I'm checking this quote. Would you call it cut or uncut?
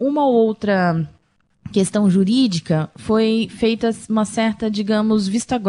uncut